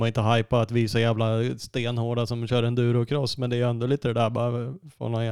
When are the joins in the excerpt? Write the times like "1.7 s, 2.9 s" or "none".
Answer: none